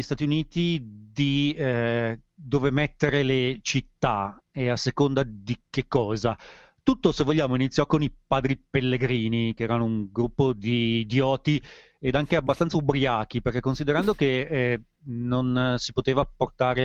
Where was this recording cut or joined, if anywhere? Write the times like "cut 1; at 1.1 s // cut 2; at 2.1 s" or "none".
none